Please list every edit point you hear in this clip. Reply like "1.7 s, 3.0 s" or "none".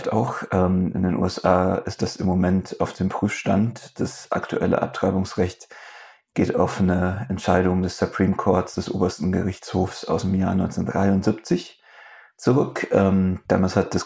none